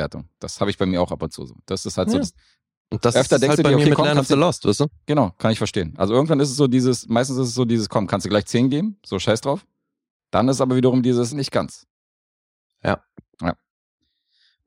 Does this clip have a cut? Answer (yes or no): yes